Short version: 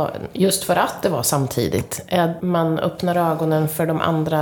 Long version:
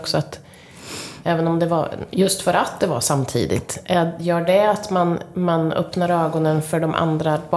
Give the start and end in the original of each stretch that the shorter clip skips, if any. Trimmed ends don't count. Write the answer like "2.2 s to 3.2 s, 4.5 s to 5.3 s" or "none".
4.2 s to 5.3 s